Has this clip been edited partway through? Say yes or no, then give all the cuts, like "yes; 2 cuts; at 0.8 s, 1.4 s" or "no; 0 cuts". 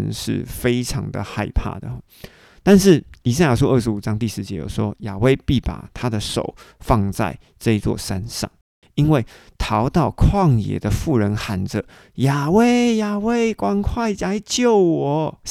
yes; 1 cut; at 8.8 s